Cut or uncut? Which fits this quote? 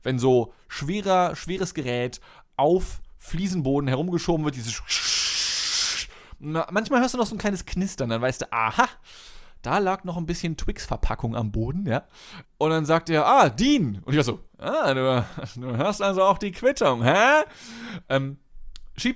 cut